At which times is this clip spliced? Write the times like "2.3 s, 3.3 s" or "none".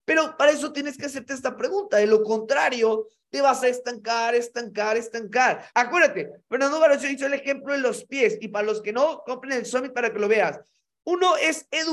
3.6 s, 5.7 s